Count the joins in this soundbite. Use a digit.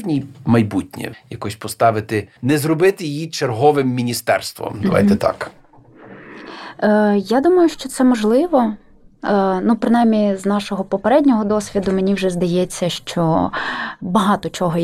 2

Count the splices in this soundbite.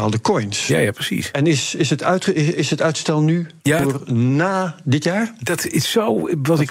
1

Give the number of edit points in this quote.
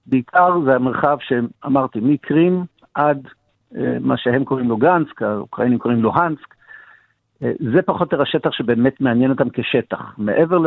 0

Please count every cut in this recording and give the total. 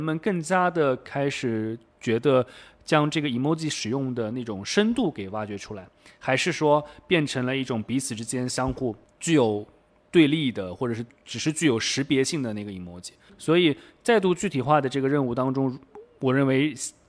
1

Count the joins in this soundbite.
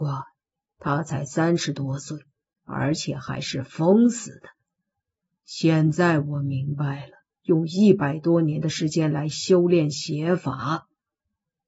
2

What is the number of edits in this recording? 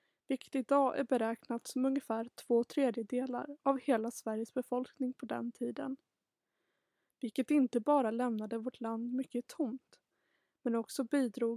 0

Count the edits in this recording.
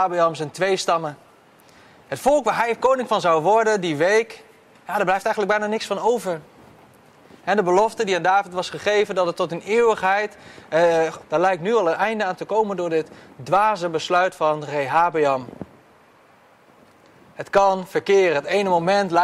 1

